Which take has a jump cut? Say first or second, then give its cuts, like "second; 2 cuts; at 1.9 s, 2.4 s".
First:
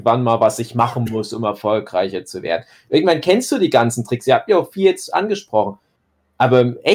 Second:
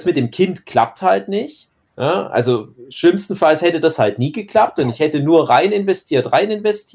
second; 1 cut; at 1.8 s